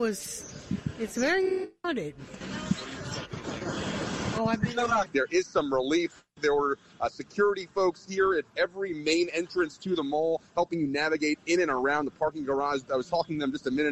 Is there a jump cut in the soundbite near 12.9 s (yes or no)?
no